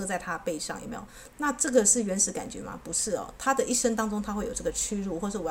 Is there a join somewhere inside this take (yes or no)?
yes